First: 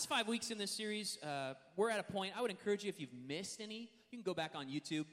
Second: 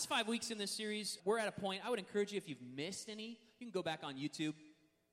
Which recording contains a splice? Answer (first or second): second